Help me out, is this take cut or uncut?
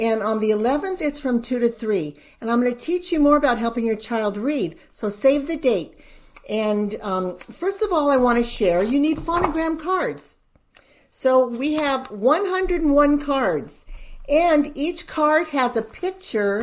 uncut